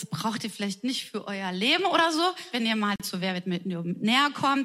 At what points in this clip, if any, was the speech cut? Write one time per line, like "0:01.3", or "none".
0:02.5